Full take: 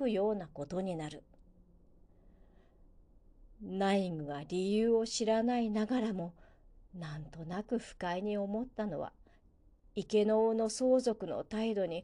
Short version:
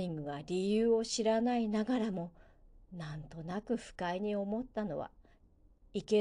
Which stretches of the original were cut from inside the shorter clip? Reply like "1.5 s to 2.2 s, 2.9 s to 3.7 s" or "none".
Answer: none

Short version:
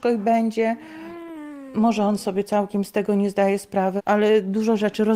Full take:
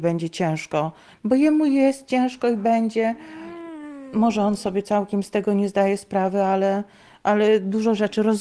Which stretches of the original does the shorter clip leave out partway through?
6.4 s to 7.1 s

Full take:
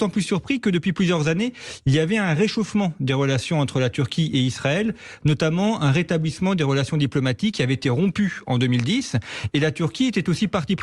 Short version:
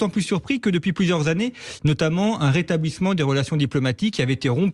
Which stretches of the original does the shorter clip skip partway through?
1.8 s to 5.2 s

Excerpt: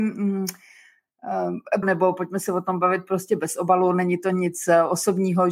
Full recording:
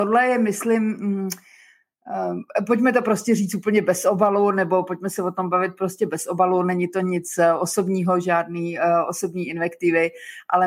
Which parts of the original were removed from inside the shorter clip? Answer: 2.7 s to 4.5 s

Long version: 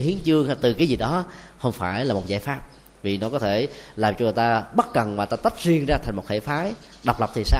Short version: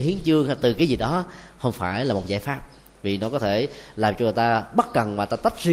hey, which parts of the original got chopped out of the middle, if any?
none

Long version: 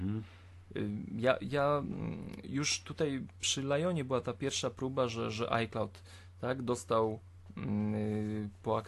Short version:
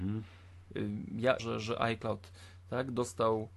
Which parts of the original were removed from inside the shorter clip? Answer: 1.4 s to 5.1 s

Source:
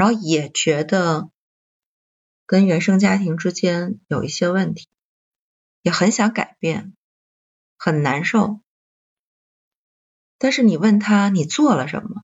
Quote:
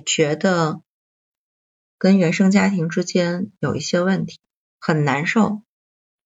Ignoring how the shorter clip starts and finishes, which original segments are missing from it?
5.1 s to 7.6 s

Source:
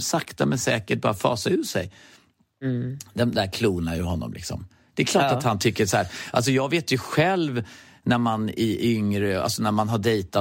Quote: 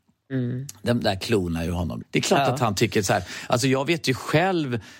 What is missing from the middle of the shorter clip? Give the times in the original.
4.3 s to 4.9 s

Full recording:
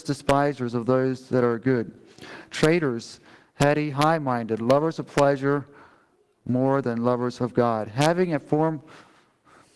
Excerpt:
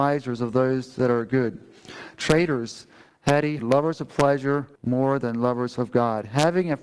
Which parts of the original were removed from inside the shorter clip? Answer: 3.9 s to 4.6 s, 5.7 s to 6.4 s

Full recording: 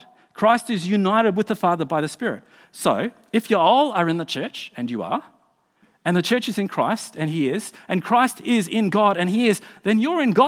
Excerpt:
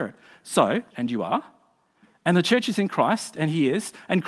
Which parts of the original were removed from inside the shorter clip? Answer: 3.2 s to 4.7 s

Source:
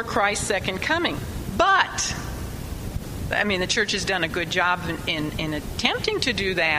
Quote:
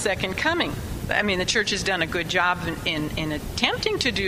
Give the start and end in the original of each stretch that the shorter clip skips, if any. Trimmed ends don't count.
1.5 s to 3.3 s

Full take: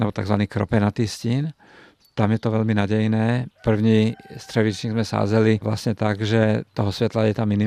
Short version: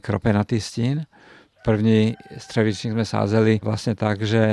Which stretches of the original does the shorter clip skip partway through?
2.0 s to 3.5 s

